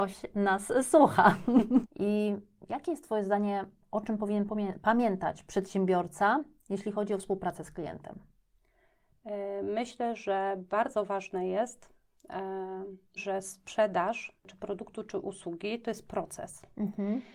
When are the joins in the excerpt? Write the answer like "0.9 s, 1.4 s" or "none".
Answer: 1.8 s, 13.2 s